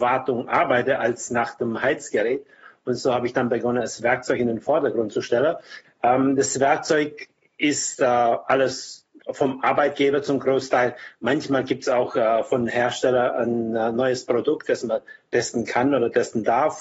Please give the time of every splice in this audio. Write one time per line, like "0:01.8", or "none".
0:05.8